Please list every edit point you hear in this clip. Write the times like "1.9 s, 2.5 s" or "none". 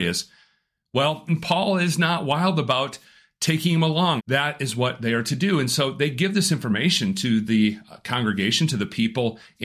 1.3 s, 4.2 s